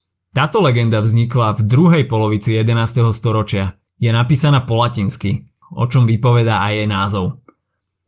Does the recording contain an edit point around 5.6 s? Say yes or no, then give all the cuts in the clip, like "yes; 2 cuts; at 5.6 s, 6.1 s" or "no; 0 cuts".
yes; 2 cuts; at 3.9 s, 5.6 s